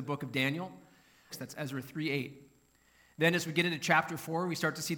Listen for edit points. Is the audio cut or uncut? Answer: cut